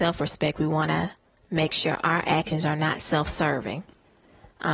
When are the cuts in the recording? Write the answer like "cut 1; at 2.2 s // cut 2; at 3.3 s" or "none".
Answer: none